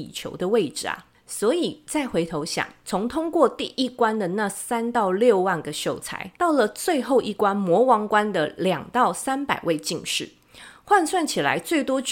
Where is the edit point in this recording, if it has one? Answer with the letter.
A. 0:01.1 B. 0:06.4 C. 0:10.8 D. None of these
B